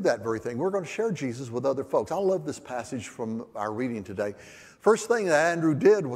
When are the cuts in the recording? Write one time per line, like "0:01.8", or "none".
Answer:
none